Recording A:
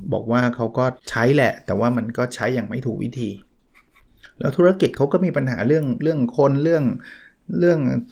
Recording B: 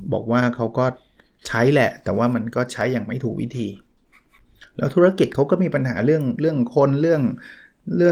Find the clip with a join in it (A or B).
A